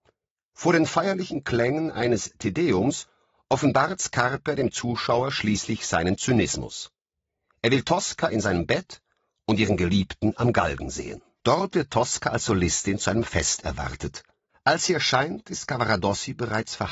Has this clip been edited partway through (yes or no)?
yes